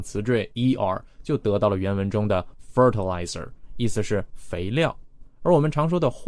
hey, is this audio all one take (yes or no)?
yes